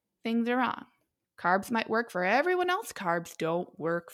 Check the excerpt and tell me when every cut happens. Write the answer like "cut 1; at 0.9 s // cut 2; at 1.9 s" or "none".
cut 1; at 1.2 s

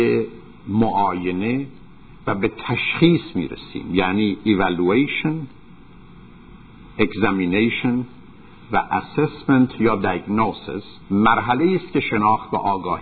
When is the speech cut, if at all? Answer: cut 1; at 11.0 s

